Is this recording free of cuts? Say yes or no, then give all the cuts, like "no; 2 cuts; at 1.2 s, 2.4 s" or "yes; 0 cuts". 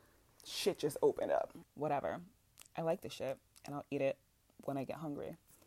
no; 1 cut; at 1.6 s